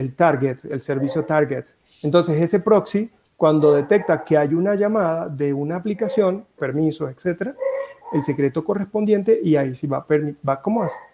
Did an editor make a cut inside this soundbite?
yes; 2 cuts; at 6.6 s, 8.0 s

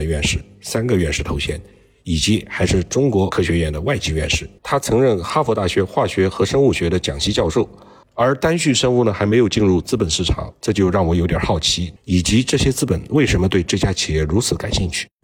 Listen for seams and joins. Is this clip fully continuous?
no; 2 cuts; at 8.0 s, 12.0 s

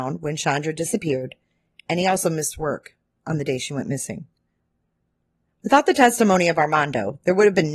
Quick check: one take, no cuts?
yes; 0 cuts

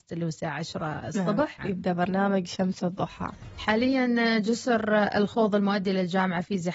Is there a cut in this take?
yes; 1 cut; at 1.6 s

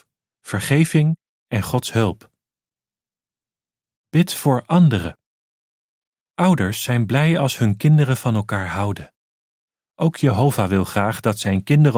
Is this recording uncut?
yes; 0 cuts

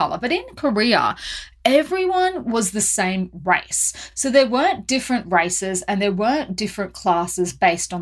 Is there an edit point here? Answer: no; 0 cuts

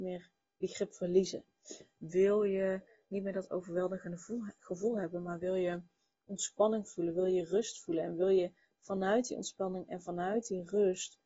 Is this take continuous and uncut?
yes; 0 cuts

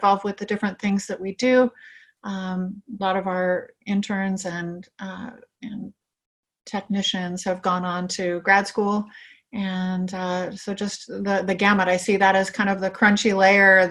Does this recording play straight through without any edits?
yes; 0 cuts

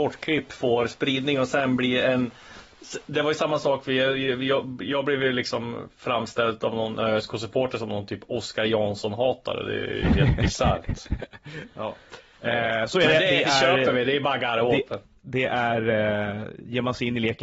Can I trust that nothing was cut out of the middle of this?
yes; 0 cuts

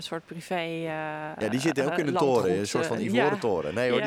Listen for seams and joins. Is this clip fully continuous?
yes; 0 cuts

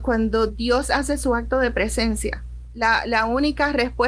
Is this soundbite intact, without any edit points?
yes; 0 cuts

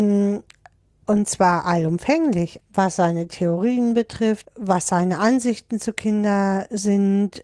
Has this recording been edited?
yes; 2 cuts; at 2.6 s, 4.4 s

